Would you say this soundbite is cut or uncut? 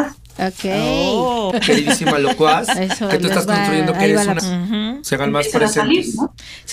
cut